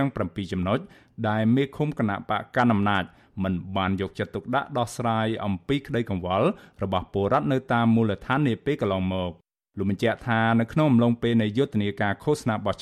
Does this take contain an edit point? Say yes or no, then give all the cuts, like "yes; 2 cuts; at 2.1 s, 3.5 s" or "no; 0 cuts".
no; 0 cuts